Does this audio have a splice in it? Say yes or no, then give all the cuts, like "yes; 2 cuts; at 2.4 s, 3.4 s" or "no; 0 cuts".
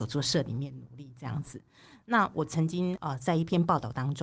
no; 0 cuts